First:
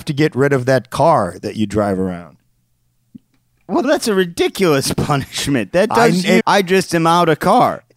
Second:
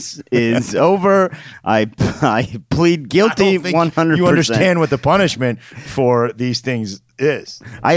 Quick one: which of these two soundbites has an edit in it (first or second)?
first